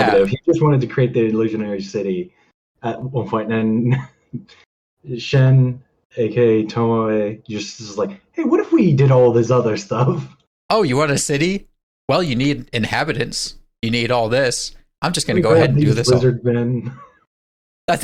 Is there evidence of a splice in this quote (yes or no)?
no